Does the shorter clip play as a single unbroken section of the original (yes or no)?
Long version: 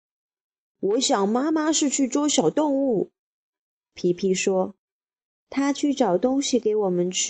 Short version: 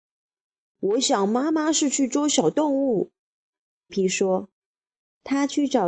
no